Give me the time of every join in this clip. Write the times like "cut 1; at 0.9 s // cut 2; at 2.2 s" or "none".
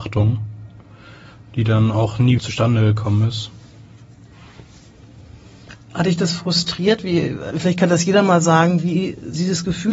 cut 1; at 2.4 s // cut 2; at 7.5 s